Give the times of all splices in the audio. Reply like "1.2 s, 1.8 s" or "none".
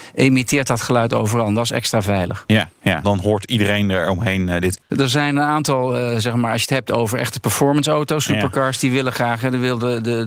3.0 s, 4.9 s